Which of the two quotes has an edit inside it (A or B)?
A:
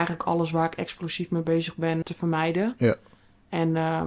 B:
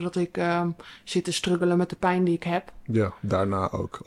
A